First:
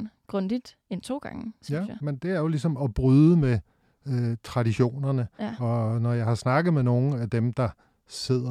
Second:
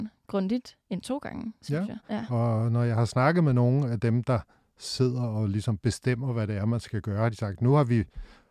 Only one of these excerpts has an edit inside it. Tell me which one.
second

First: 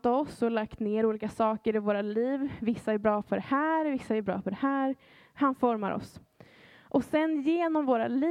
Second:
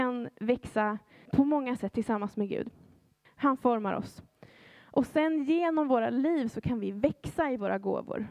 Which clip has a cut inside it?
second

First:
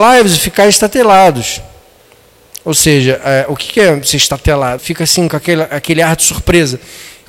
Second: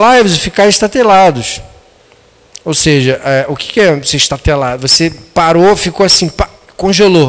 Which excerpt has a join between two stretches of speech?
first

